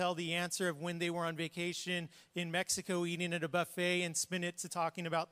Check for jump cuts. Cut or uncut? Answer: uncut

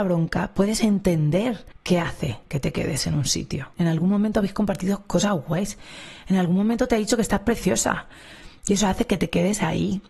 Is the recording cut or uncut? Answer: cut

